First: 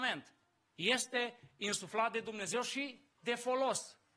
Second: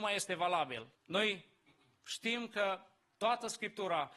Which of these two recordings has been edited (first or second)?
second